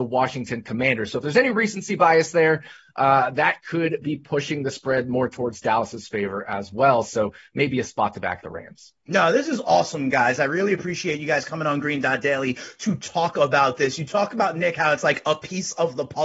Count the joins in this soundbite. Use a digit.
0